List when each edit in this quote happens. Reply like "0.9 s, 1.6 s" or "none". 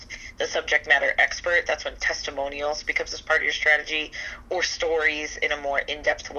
none

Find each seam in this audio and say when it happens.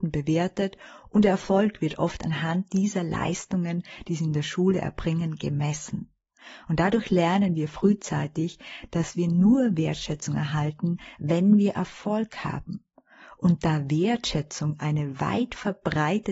none

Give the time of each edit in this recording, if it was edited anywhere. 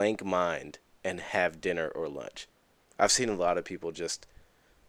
2.8 s

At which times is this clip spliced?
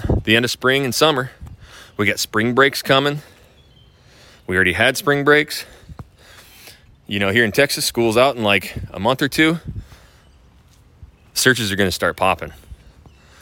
none

